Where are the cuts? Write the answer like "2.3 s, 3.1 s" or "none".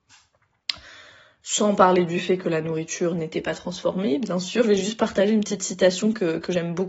4.6 s